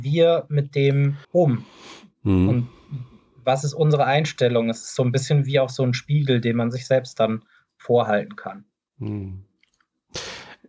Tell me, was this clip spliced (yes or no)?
yes